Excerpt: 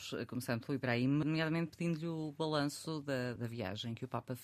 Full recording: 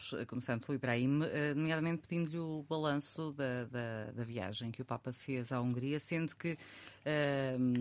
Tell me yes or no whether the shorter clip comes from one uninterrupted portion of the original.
no